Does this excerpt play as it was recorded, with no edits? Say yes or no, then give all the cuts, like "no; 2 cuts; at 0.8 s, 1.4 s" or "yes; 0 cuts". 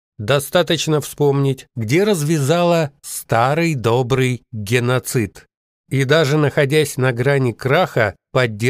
no; 1 cut; at 1.7 s